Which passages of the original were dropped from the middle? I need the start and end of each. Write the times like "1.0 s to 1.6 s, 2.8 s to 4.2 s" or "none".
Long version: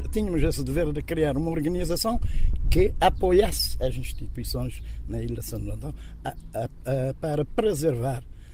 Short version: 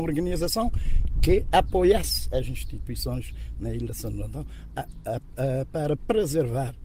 none